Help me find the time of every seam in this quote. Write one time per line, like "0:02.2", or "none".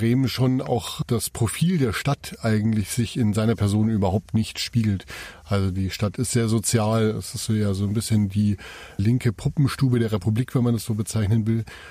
none